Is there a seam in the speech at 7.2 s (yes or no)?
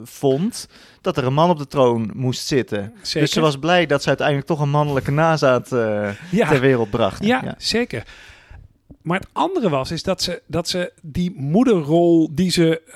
yes